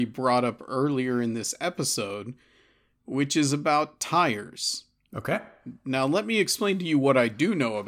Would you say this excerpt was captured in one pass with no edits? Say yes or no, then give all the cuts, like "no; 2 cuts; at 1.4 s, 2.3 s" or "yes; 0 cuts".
yes; 0 cuts